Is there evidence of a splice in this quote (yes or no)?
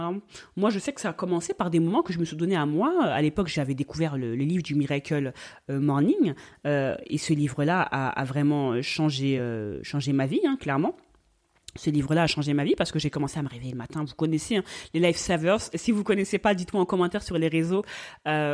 no